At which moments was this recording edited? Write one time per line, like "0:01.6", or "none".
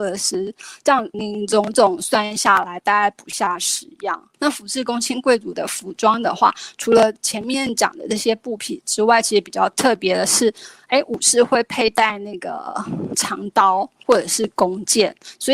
0:01.1
0:04.3